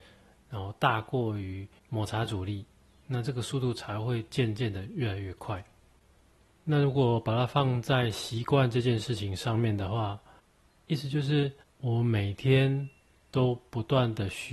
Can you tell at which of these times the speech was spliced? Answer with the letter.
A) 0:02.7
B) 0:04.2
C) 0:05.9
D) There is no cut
D